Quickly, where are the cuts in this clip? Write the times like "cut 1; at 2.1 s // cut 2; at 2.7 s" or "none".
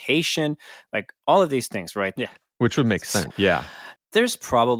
cut 1; at 2.2 s // cut 2; at 3.3 s